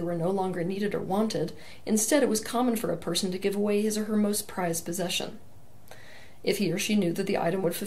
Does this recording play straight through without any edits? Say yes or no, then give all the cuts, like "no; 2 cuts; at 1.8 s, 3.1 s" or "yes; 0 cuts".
yes; 0 cuts